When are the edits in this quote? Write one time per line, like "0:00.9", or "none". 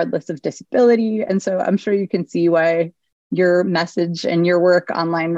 none